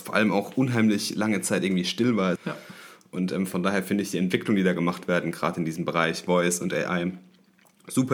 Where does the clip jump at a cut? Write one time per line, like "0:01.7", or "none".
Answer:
0:02.4